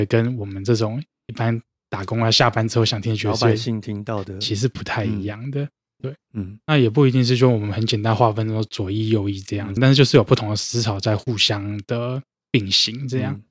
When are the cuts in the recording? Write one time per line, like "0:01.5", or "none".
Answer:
0:06.0
0:09.8